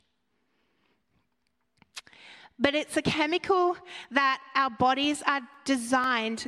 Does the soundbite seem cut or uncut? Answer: uncut